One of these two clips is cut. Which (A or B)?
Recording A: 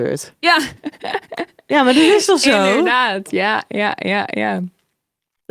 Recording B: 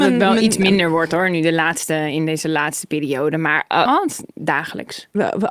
B